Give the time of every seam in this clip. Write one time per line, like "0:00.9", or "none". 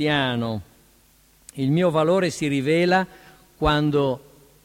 none